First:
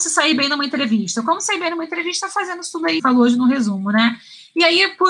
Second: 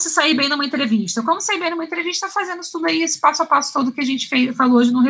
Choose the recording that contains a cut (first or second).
first